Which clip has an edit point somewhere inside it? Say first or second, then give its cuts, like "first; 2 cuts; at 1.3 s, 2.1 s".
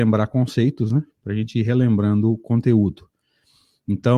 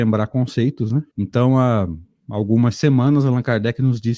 second; 1 cut; at 1.1 s